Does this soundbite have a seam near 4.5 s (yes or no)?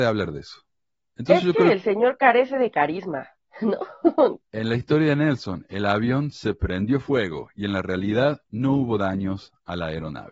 yes